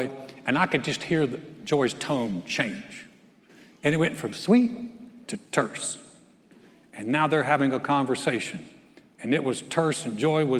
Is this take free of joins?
yes; 0 cuts

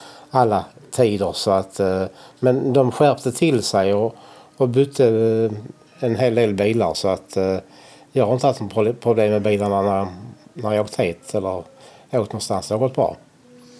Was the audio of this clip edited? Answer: no; 0 cuts

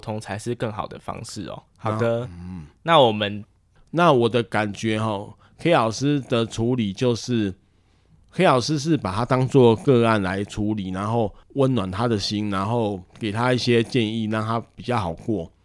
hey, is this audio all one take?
no; 3 cuts; at 1.7 s, 3.8 s, 11.4 s

